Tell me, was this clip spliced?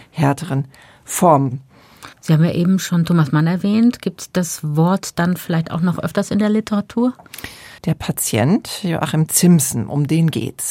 yes; 2 cuts; at 2.1 s, 7.8 s

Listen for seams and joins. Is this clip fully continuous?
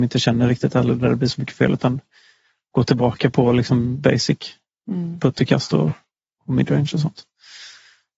yes; 0 cuts

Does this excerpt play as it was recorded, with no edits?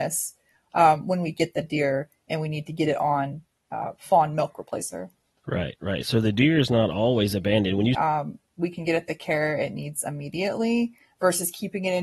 no; 1 cut; at 7.9 s

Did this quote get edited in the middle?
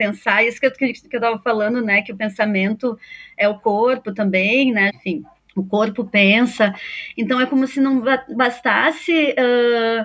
yes; 1 cut; at 4.9 s

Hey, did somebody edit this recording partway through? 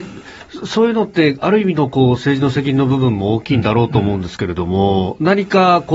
no; 0 cuts

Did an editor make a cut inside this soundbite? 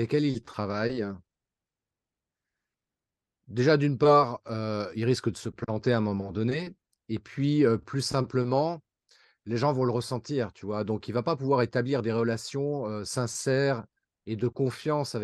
no; 0 cuts

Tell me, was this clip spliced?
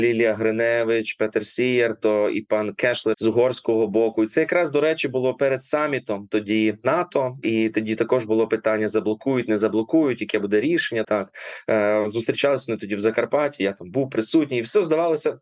yes; 2 cuts; at 3.1 s, 11.0 s

